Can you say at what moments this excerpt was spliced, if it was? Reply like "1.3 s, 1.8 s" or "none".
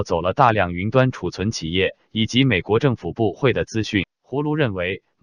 4.0 s

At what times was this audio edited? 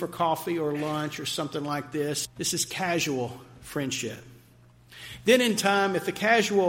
2.3 s

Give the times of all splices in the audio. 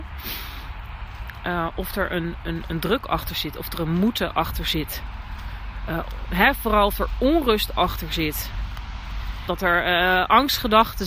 6.3 s, 9.5 s

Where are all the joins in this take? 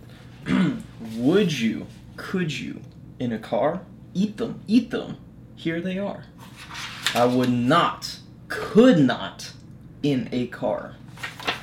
none

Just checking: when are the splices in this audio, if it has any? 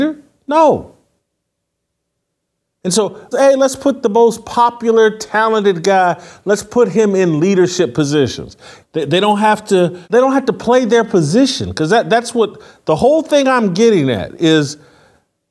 3.3 s, 8.8 s, 10.0 s

